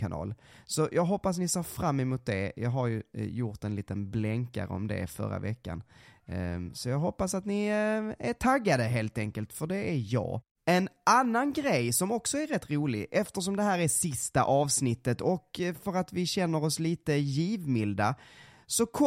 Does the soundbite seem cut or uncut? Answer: uncut